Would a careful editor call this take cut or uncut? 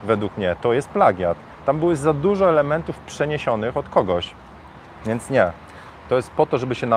uncut